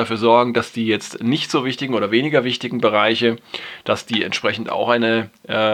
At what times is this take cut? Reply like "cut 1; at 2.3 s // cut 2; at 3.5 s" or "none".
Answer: none